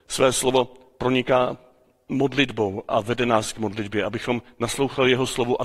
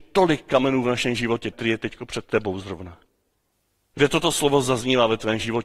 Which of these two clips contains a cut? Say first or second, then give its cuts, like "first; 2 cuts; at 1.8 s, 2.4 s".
second; 2 cuts; at 1.5 s, 3.9 s